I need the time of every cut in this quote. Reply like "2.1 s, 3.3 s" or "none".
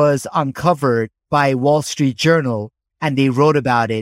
1.2 s